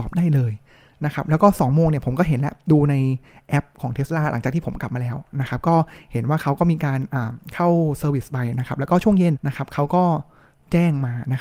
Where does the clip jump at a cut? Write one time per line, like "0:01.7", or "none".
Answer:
0:09.3